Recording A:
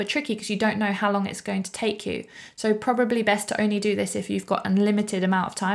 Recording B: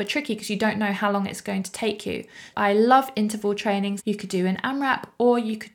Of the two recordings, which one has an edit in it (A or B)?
B